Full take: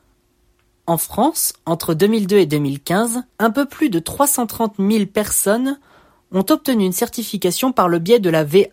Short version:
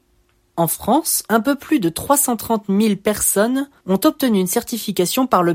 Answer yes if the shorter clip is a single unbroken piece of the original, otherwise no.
no